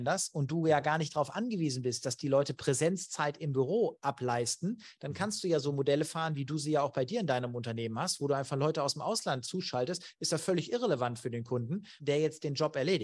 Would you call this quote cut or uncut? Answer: cut